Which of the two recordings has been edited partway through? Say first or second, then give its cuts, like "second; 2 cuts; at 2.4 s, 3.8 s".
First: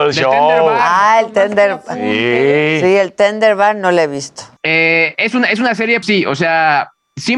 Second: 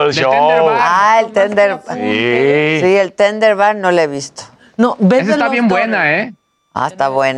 first; 2 cuts; at 4.6 s, 6.0 s